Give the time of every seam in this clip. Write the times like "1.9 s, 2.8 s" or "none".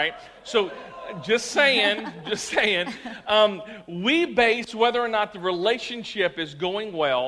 none